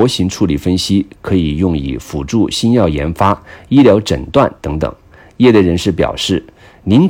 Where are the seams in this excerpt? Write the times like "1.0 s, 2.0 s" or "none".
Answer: none